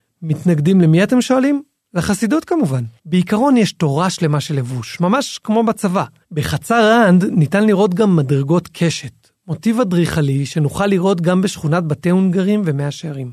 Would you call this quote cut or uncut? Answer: cut